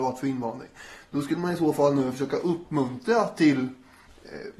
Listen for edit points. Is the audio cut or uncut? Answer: uncut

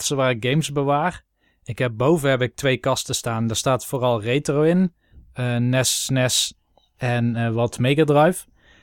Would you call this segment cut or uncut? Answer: uncut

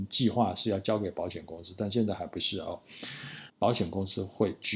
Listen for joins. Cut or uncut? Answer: cut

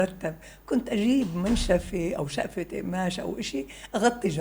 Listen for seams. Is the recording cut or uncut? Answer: uncut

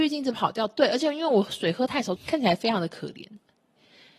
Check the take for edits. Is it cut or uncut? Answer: cut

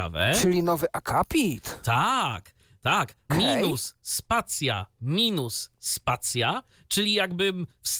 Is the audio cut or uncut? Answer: cut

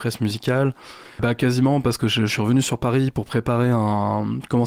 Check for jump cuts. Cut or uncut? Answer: cut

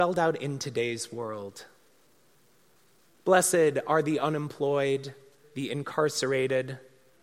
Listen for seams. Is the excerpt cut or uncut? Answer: cut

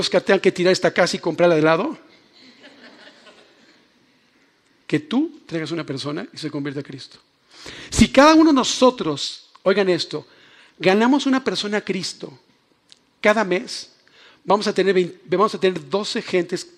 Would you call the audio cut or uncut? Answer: uncut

